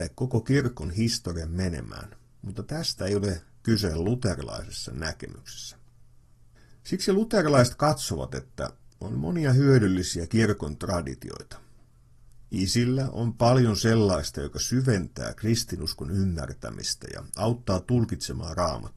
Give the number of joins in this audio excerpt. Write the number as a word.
zero